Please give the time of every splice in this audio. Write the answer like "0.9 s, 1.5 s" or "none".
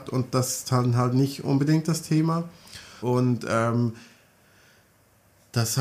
3.0 s